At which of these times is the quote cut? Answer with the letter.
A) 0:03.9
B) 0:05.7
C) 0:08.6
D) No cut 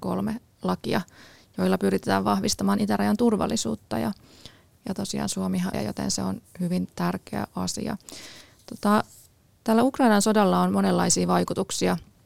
B